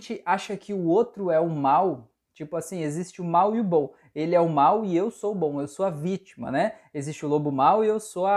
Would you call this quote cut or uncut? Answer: uncut